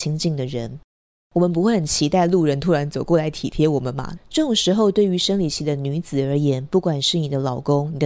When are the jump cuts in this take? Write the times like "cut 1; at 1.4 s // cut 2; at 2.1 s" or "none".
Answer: cut 1; at 4.2 s